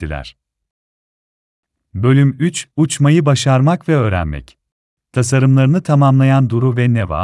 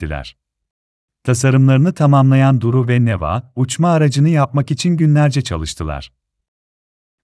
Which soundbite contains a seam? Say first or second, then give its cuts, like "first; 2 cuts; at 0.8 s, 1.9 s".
second; 1 cut; at 1.0 s